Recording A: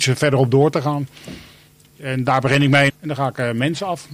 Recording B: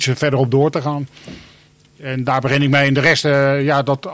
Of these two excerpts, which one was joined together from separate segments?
A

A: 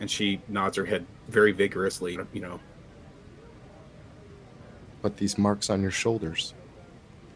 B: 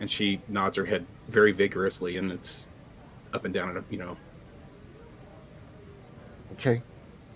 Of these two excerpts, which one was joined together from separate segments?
A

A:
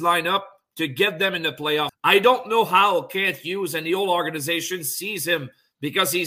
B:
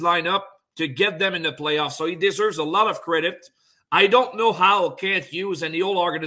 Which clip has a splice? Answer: A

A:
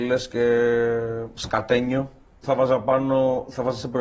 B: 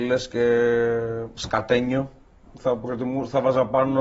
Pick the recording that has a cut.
A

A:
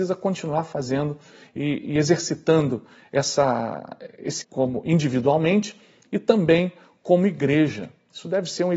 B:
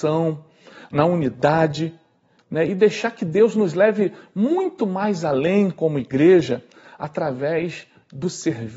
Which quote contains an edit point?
A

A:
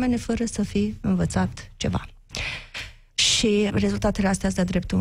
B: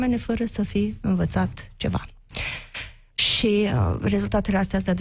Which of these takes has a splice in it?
A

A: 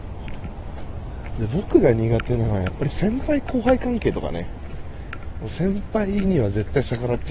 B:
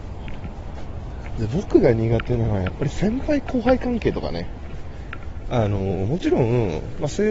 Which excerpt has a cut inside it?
B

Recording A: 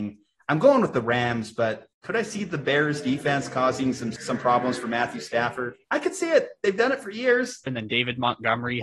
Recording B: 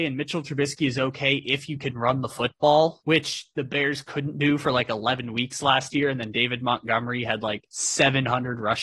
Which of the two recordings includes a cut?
A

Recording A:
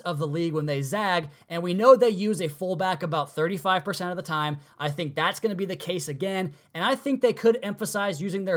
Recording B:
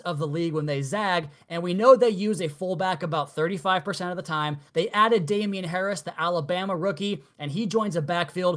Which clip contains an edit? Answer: B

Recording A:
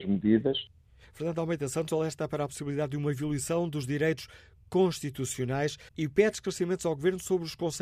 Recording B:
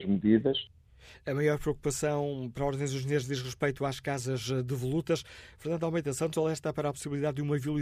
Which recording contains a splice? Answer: A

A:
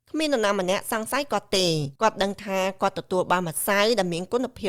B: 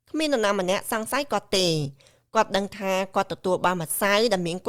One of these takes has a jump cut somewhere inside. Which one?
A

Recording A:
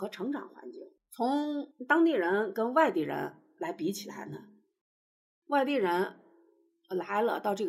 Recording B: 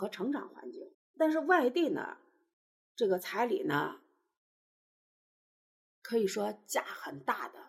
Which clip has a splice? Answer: B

